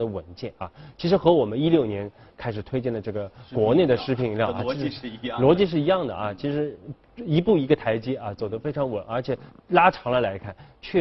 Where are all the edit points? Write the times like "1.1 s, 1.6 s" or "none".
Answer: none